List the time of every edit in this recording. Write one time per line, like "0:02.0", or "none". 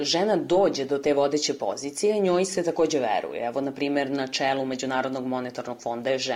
none